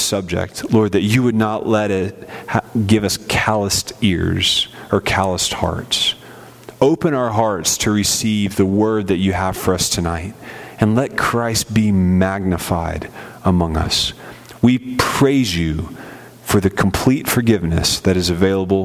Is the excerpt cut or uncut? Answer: uncut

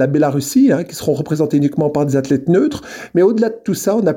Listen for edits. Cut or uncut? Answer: uncut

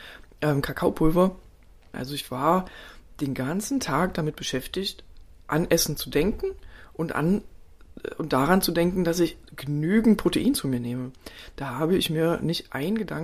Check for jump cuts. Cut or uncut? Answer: cut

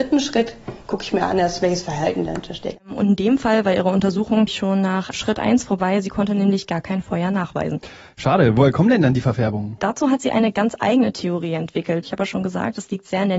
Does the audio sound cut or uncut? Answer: cut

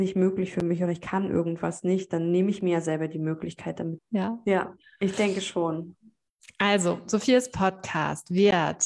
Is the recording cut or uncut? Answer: cut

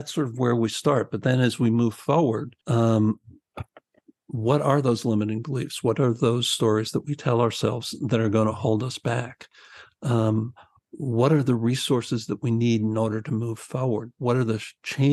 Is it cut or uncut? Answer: cut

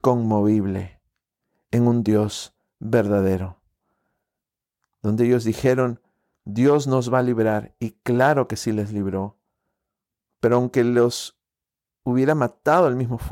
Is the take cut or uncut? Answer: uncut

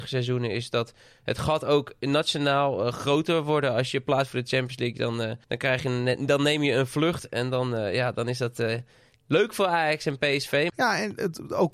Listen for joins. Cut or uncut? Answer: cut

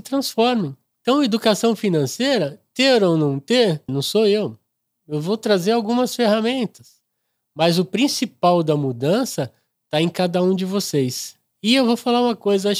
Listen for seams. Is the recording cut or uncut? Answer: cut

